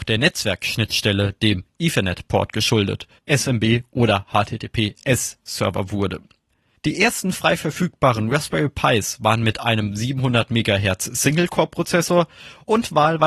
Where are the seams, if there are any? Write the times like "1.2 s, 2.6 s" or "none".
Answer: 3.2 s, 6.8 s